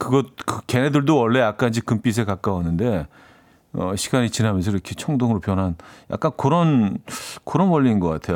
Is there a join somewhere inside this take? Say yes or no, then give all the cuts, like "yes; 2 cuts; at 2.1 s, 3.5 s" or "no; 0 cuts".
no; 0 cuts